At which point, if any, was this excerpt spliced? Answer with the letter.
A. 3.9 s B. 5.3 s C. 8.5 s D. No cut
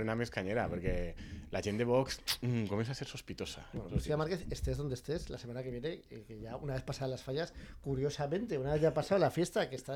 A